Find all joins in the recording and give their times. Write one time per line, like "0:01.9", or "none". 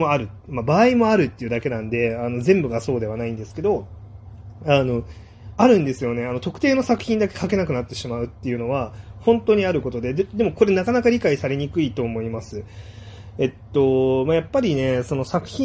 none